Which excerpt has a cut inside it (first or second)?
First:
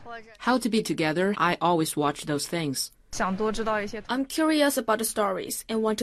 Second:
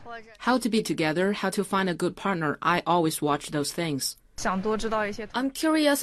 first